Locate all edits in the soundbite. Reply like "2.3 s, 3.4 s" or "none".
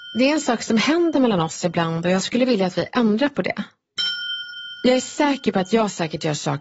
none